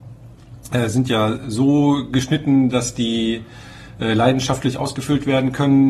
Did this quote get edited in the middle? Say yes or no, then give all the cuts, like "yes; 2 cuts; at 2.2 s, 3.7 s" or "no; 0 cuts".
no; 0 cuts